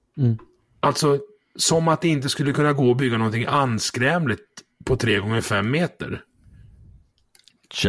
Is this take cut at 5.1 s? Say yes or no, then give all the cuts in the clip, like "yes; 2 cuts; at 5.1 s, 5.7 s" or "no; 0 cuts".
no; 0 cuts